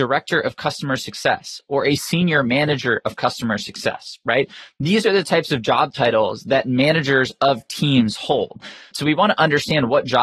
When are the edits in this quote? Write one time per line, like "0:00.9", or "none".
0:08.9